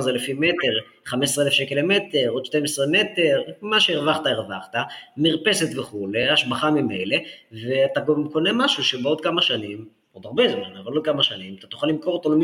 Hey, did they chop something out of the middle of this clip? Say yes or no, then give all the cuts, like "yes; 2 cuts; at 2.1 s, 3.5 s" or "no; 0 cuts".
no; 0 cuts